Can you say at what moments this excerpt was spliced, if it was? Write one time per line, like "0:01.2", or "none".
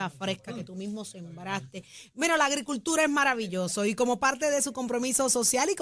none